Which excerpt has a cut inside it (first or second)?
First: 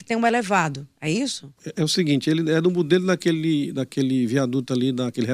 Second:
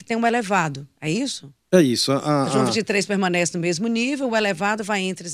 first